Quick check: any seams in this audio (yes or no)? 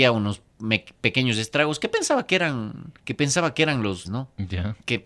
yes